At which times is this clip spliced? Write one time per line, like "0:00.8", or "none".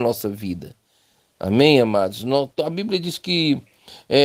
none